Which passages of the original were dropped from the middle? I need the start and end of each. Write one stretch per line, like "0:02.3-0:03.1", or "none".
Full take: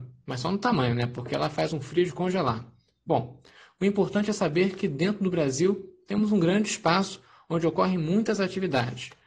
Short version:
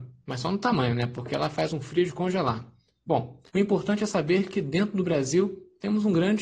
0:03.5-0:03.7